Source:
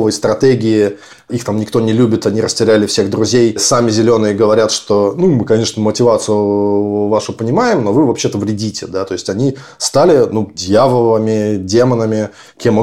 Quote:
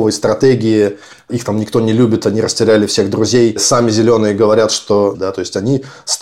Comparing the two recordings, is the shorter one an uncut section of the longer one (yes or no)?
no